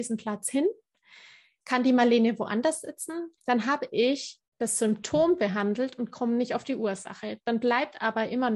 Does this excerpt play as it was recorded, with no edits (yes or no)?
no